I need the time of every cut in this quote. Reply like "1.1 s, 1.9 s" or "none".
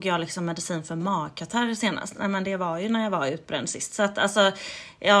none